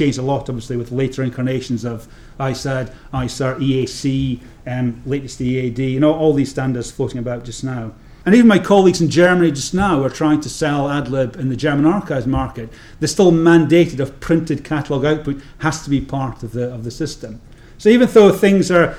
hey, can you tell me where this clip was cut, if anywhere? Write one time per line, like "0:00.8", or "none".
0:08.2